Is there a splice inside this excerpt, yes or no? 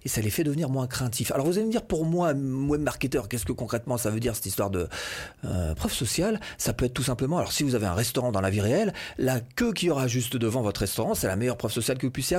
yes